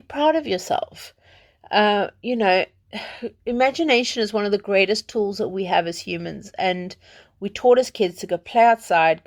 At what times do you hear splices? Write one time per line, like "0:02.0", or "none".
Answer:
none